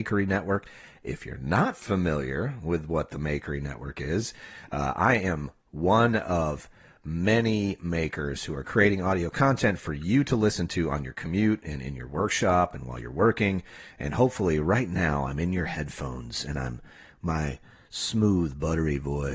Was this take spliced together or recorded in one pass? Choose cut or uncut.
uncut